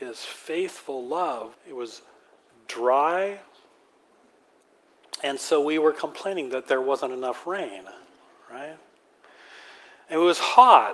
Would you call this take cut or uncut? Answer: cut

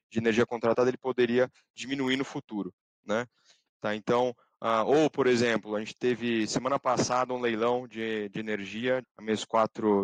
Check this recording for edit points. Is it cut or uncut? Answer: cut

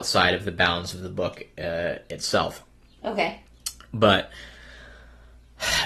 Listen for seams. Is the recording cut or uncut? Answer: uncut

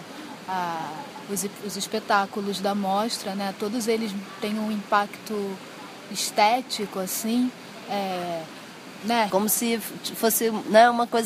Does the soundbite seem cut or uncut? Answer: cut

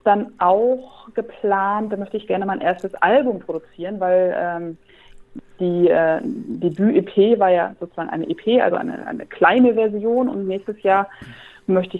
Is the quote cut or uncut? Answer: uncut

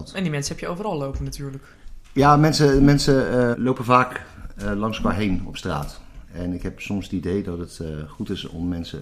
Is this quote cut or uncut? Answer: cut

